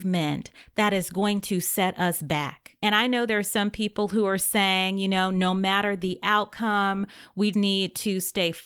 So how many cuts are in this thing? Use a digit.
1